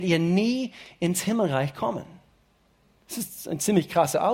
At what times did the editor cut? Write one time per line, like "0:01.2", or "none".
none